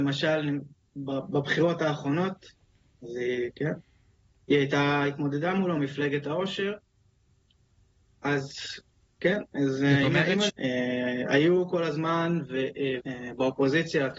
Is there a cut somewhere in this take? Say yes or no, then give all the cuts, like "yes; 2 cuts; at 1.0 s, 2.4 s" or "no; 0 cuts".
yes; 2 cuts; at 10.5 s, 13.0 s